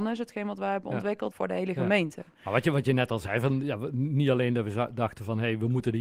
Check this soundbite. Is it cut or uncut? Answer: cut